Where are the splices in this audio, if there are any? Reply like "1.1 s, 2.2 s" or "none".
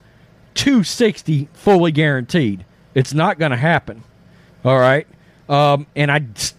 4.5 s